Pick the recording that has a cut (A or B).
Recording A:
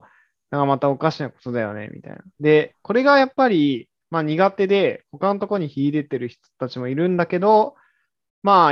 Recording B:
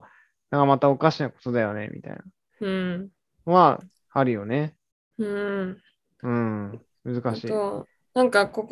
A